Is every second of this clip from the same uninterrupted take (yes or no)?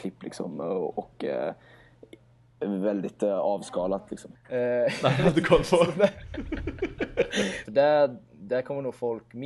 no